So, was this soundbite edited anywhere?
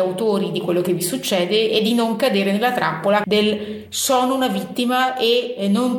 yes; 1 cut; at 3.2 s

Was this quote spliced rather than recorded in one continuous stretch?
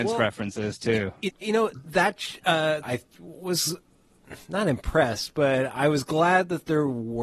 yes; 2 cuts; at 1.4 s, 2.8 s

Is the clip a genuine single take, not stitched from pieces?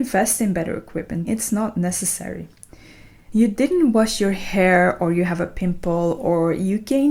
no; 2 cuts; at 1.2 s, 3.3 s

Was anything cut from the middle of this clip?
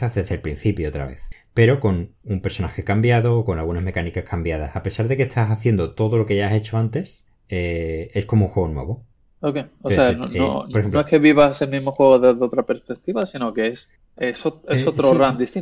no; 0 cuts

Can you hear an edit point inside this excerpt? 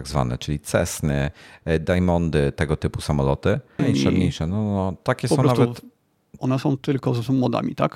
yes; 2 cuts; at 3.8 s, 6.4 s

